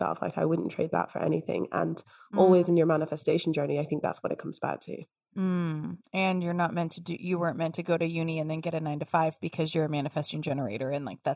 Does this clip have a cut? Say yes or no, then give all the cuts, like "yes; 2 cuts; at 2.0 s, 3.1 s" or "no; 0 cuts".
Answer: no; 0 cuts